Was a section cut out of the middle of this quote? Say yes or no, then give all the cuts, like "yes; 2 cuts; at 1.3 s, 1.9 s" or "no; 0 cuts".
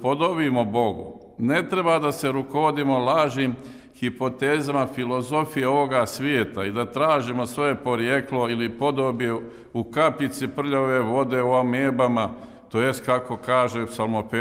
no; 0 cuts